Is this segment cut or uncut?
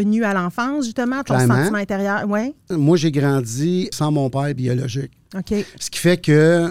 cut